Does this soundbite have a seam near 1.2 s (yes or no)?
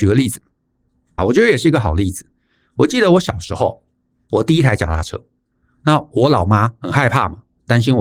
yes